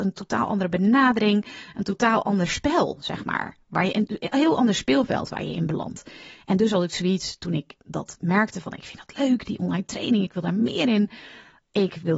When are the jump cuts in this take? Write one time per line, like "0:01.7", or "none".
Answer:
none